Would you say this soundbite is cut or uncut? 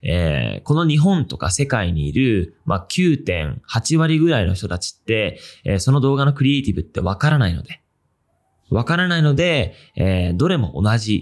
uncut